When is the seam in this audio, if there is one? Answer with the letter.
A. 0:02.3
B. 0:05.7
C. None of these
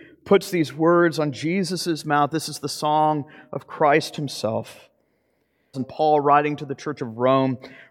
B